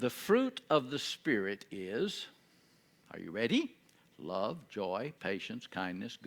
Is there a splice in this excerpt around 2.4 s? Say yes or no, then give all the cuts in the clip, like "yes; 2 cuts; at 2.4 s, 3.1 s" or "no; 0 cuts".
no; 1 cut; at 5.2 s